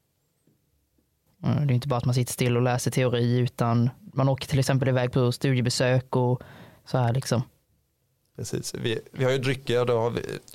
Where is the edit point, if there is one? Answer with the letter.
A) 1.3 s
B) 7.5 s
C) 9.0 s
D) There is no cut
A